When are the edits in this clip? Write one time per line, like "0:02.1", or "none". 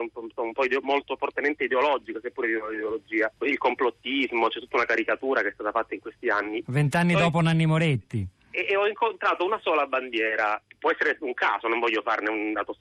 0:03.4
0:06.6